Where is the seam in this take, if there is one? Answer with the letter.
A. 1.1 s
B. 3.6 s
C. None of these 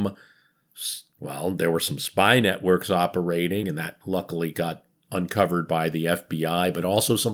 C